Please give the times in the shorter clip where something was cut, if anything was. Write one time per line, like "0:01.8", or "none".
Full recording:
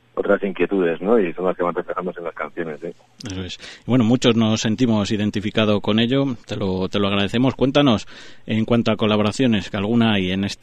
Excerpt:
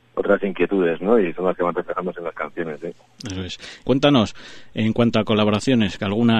0:03.8